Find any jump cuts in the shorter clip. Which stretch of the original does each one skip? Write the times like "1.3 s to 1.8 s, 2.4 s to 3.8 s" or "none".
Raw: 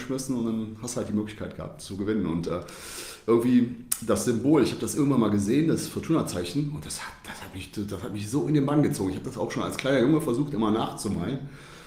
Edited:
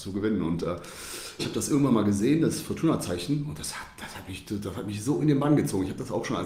3.2 s to 4.7 s